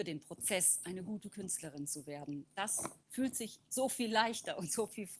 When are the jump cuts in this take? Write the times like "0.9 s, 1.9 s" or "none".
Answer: none